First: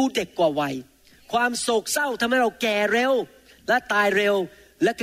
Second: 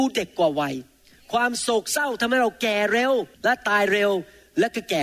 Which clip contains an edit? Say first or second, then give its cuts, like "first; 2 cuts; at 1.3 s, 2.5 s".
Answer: second; 1 cut; at 3.3 s